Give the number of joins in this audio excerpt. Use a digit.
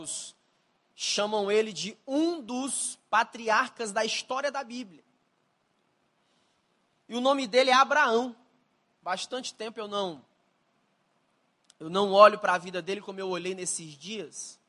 1